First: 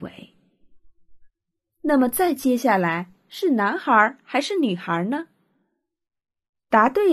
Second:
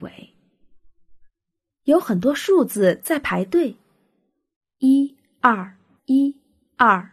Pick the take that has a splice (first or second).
second